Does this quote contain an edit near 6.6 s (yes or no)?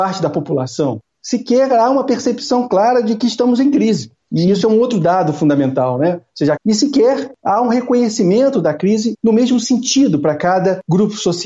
yes